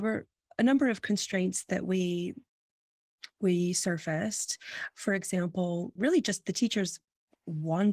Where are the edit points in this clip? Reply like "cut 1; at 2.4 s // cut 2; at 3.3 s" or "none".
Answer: cut 1; at 4.9 s // cut 2; at 6.0 s